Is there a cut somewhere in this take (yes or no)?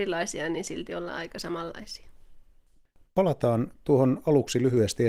no